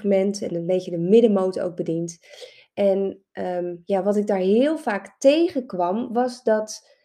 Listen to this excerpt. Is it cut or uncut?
uncut